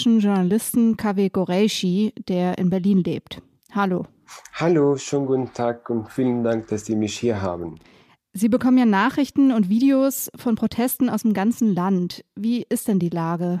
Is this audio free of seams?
yes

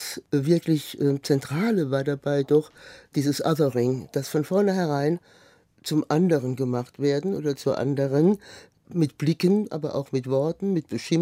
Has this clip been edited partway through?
no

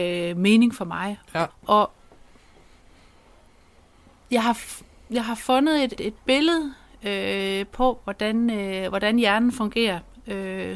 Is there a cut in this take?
yes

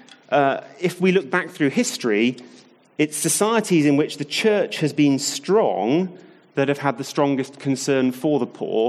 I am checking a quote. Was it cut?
no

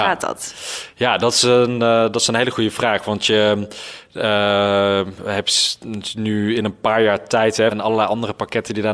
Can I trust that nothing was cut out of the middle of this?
no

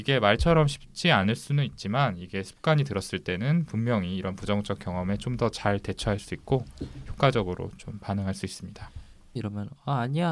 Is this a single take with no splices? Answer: no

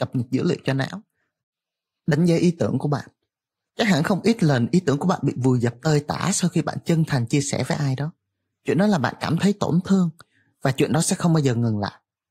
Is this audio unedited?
yes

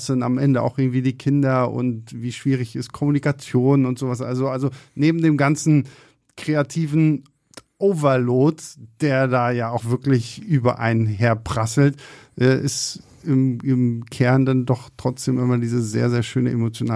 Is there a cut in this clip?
yes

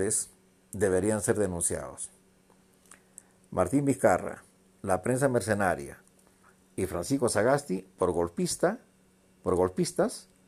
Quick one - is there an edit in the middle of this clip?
no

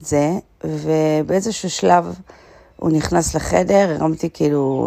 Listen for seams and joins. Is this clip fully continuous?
yes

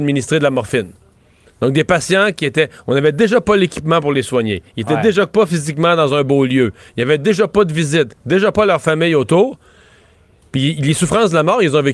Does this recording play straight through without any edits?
yes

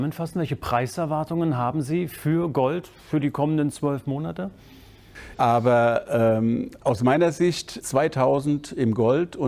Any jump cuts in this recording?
yes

